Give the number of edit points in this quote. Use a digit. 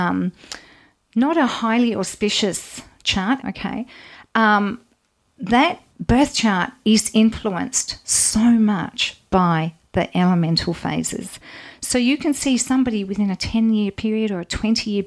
2